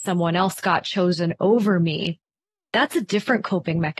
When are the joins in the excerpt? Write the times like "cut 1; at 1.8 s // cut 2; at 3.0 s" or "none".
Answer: none